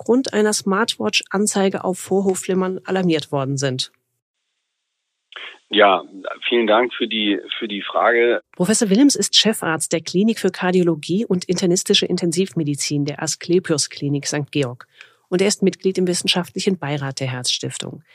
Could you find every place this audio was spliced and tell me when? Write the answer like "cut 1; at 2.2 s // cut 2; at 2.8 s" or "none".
cut 1; at 8.4 s